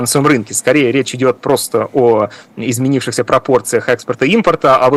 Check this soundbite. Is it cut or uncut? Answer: uncut